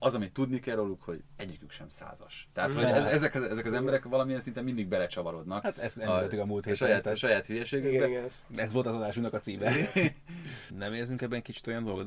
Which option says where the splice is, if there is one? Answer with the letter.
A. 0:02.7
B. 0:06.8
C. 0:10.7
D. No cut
C